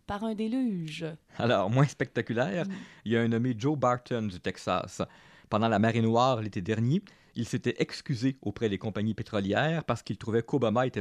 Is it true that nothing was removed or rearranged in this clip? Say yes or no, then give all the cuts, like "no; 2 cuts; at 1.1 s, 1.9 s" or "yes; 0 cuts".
yes; 0 cuts